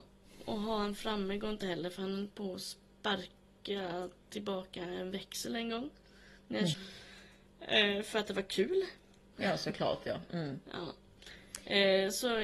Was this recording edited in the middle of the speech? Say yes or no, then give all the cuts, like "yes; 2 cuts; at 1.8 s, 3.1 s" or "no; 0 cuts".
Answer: yes; 2 cuts; at 6.7 s, 9.3 s